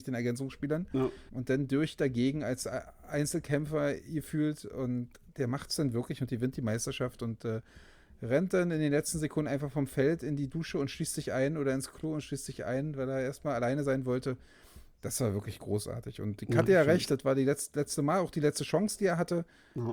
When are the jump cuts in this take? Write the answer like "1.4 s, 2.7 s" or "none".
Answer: 1.3 s